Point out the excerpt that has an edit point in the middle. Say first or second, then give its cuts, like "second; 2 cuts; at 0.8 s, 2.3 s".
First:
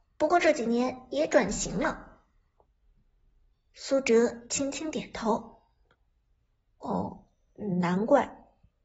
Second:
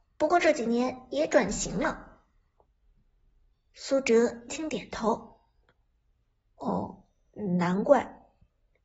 second; 1 cut; at 4.5 s